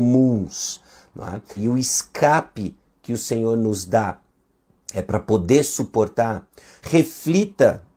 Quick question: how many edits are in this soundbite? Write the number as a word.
two